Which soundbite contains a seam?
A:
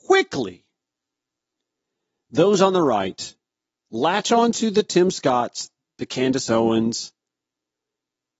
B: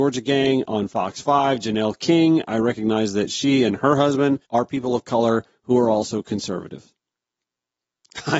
B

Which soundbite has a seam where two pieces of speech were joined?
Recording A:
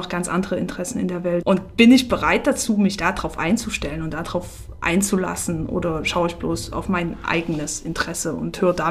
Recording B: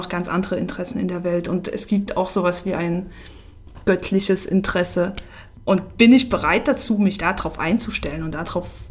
A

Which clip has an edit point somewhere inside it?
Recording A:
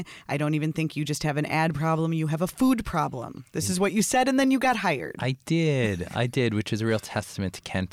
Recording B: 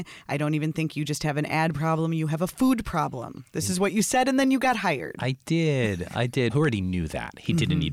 B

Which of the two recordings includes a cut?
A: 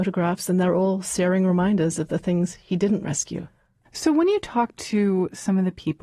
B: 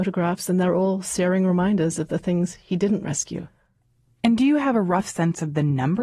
A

